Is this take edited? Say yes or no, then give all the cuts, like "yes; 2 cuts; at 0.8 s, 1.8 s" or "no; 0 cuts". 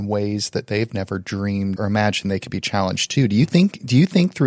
yes; 1 cut; at 1.8 s